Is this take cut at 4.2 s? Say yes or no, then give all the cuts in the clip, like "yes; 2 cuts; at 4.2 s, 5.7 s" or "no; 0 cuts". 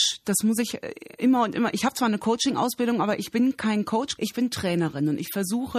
yes; 1 cut; at 4.2 s